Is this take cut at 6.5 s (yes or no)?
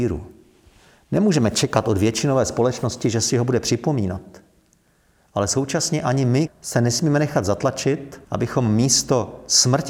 yes